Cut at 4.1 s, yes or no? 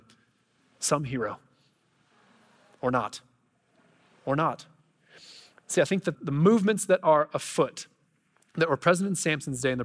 no